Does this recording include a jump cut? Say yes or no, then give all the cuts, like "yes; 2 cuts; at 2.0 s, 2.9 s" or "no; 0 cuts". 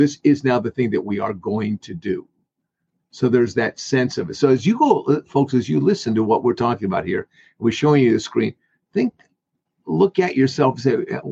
no; 0 cuts